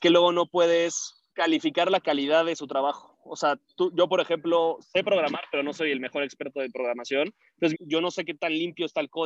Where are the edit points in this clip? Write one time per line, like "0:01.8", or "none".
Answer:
0:01.3
0:07.7

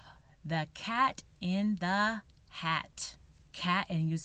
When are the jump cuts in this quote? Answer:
none

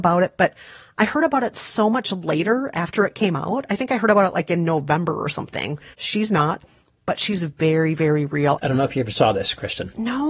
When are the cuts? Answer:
0:05.9
0:08.6

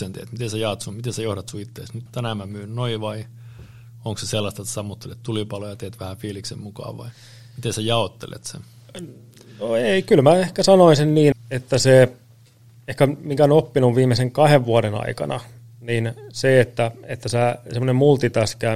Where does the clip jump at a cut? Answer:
0:02.1
0:11.3

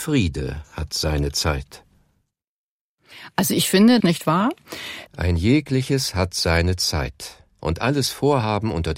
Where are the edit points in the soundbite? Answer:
0:04.0
0:05.1

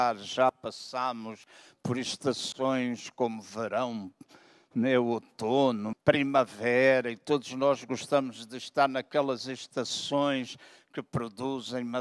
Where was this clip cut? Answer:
0:05.9

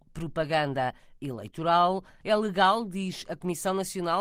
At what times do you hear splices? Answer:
0:02.2

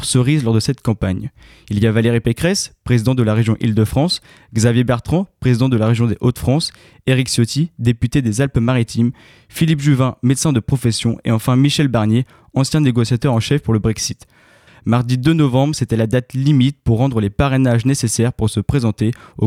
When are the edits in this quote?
0:14.7

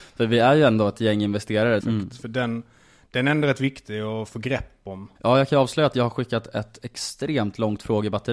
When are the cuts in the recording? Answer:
0:01.8
0:05.2

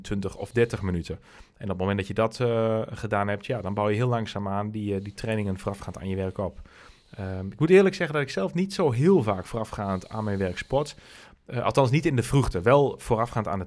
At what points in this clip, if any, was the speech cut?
none

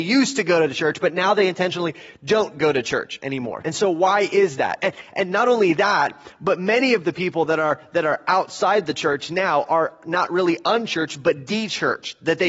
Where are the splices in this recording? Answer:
0:03.6

